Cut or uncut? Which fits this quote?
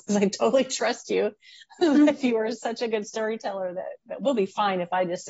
uncut